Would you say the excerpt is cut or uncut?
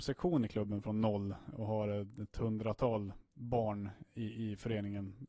uncut